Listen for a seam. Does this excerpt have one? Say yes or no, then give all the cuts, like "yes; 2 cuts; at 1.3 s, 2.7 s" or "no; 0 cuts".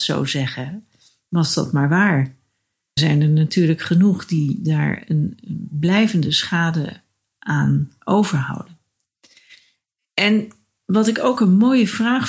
yes; 1 cut; at 3.0 s